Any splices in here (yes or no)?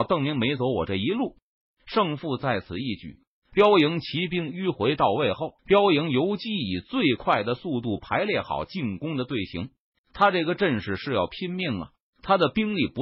yes